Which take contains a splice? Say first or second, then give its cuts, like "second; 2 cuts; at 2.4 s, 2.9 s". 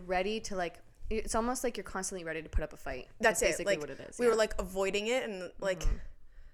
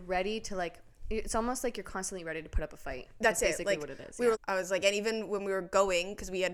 second; 1 cut; at 4.3 s